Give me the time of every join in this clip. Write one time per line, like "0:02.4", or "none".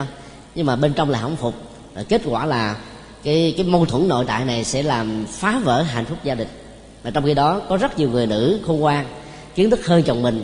none